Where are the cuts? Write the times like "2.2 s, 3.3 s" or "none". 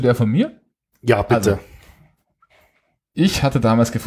none